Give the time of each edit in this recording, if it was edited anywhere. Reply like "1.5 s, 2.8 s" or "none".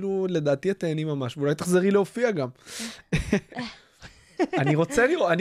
none